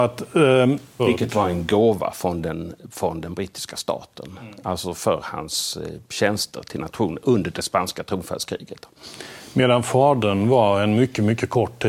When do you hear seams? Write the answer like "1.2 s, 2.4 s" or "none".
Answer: 1.0 s